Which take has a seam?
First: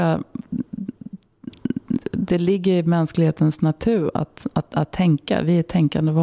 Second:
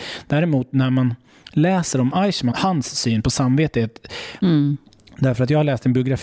second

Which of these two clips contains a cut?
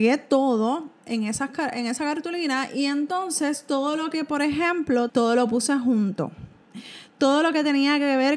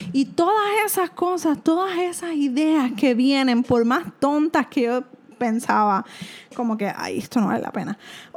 first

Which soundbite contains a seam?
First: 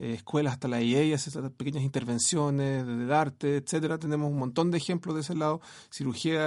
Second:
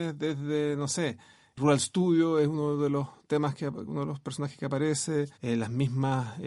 second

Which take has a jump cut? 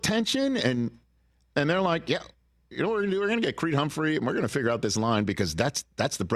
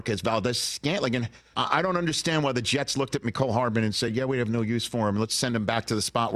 second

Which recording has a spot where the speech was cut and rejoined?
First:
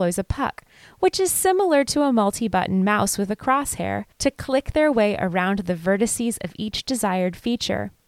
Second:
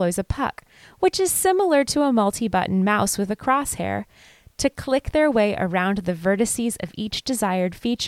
first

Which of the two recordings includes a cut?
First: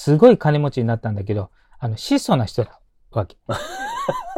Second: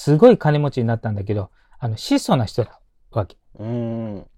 first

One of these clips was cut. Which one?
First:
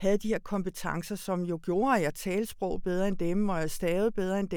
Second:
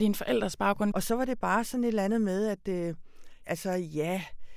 second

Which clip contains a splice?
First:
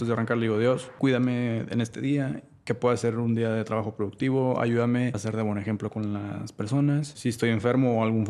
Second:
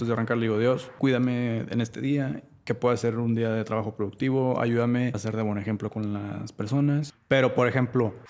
second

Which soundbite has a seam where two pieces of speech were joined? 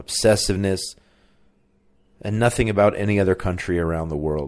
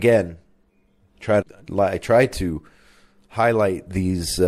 second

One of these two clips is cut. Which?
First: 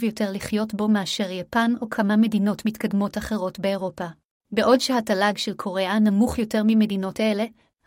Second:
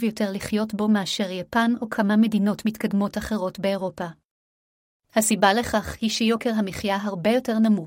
first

